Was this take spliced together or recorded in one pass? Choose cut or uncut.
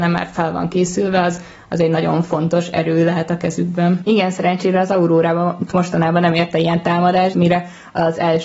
cut